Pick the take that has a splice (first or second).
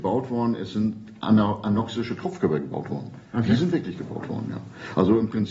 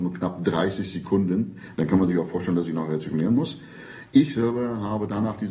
second